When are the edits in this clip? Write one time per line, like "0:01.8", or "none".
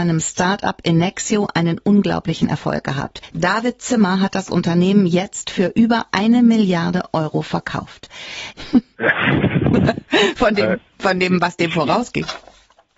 0:08.5